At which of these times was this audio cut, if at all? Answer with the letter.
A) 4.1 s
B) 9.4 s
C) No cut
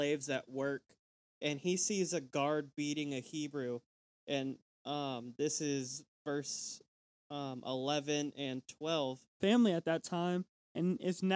B